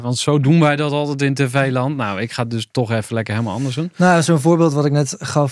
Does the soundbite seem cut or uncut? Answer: uncut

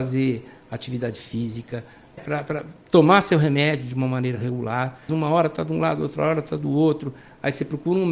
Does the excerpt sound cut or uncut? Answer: cut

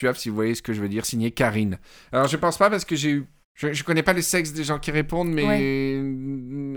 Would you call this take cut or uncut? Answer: cut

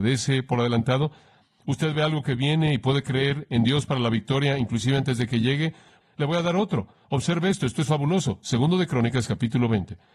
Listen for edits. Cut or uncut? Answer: uncut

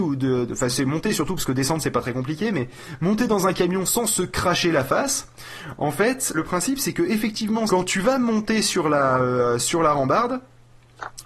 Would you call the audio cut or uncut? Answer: cut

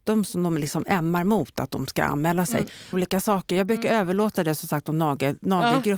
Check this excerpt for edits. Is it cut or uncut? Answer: cut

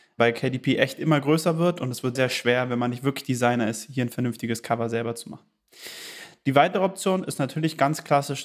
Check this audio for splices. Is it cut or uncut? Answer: cut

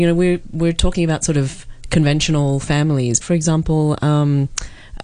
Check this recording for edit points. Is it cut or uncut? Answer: cut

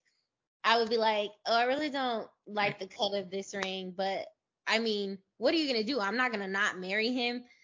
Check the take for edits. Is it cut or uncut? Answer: uncut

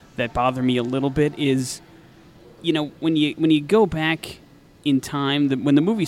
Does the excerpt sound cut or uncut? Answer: uncut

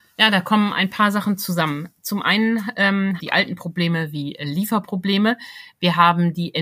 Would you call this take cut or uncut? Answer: cut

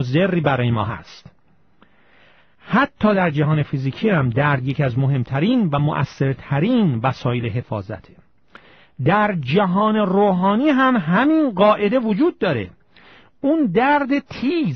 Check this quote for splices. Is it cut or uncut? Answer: uncut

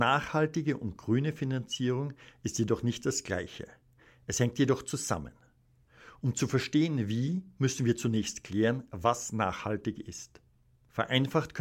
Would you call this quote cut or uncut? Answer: uncut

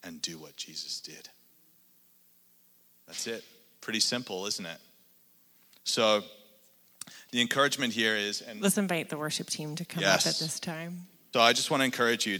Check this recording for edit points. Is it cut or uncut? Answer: cut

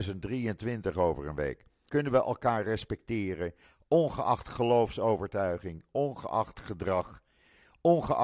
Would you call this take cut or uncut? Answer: cut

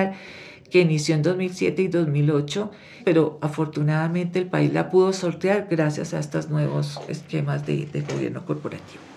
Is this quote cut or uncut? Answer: cut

